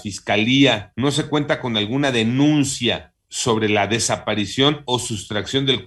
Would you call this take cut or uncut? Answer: cut